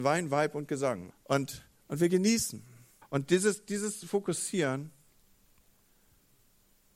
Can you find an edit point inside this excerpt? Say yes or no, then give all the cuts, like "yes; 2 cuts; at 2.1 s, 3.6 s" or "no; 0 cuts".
yes; 2 cuts; at 1.1 s, 3.0 s